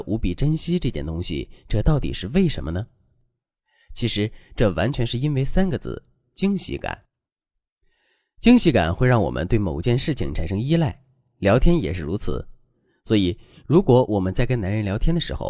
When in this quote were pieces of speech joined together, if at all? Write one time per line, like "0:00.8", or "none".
none

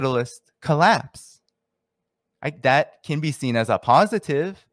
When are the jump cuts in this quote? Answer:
0:02.6

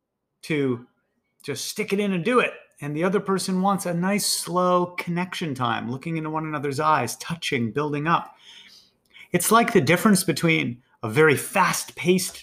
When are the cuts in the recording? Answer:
none

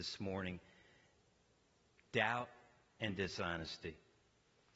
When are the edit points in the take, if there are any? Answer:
0:02.0

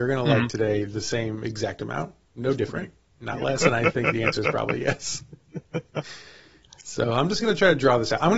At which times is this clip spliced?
0:03.6

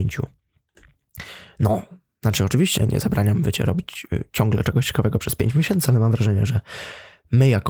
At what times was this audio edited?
0:02.8

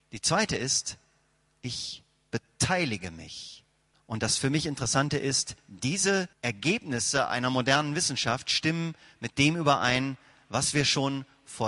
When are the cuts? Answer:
0:03.9
0:06.3

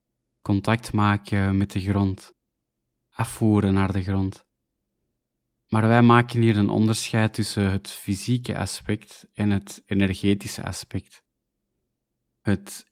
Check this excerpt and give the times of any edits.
none

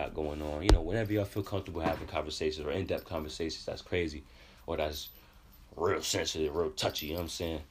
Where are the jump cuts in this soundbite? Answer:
none

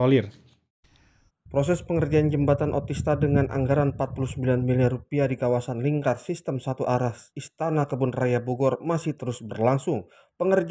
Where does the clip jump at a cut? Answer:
0:01.3
0:07.3

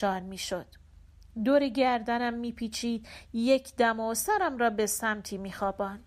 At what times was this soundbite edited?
none

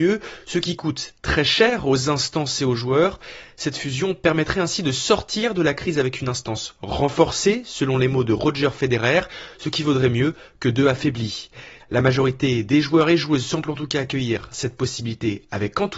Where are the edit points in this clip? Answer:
0:11.8

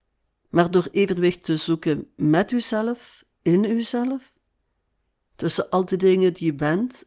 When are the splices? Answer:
0:05.2

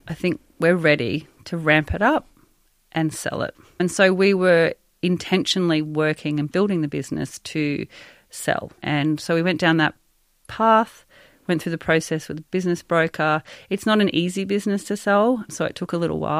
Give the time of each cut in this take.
none

